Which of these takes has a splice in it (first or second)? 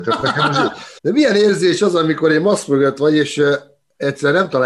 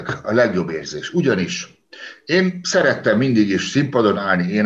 first